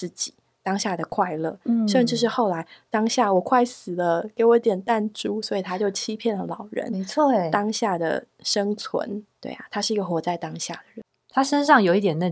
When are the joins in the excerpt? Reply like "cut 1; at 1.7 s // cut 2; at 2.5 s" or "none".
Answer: cut 1; at 9.3 s